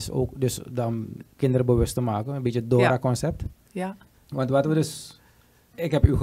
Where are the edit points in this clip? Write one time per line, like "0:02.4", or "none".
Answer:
0:04.1

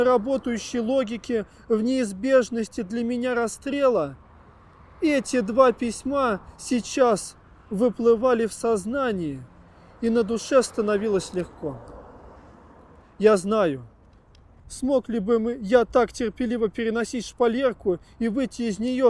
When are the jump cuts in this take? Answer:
0:14.6

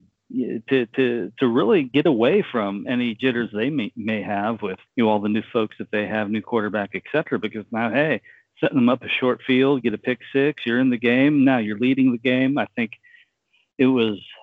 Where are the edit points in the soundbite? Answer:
none

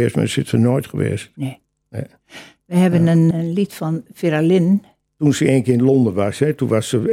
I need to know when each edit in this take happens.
0:03.3
0:05.1

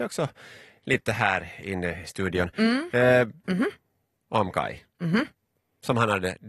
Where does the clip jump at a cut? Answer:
0:03.4

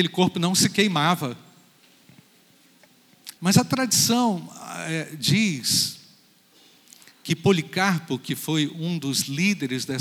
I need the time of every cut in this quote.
0:03.4

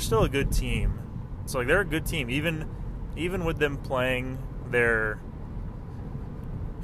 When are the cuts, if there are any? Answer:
0:01.5

